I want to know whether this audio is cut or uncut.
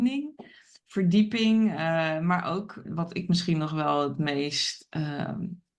cut